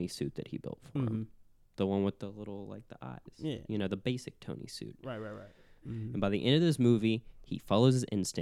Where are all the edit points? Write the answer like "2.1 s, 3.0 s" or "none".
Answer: 5.8 s